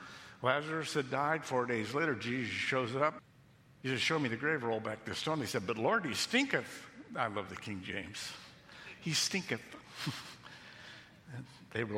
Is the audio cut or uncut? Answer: uncut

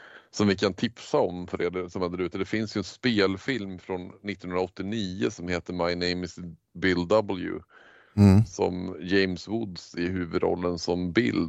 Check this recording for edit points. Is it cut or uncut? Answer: uncut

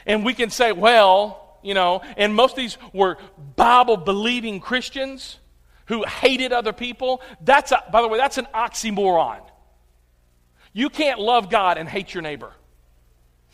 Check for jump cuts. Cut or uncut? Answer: uncut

